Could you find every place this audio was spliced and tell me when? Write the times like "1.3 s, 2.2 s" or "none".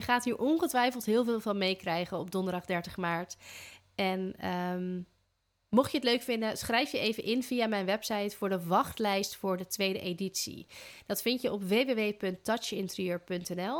none